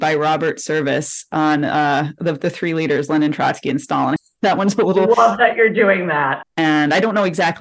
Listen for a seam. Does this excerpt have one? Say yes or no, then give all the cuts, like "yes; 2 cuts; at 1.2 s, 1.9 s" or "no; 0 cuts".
yes; 2 cuts; at 4.2 s, 6.4 s